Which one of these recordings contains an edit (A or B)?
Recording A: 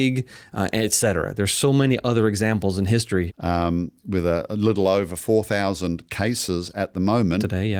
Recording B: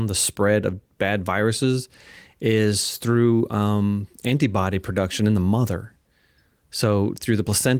A